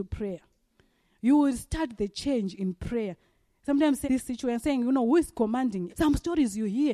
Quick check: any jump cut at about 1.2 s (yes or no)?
no